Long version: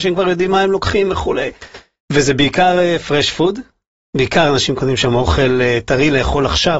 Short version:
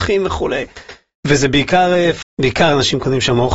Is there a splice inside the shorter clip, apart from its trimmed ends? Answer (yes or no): yes